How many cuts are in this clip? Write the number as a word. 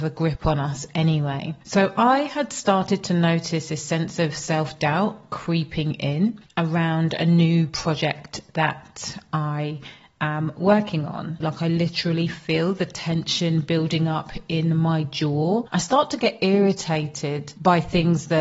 one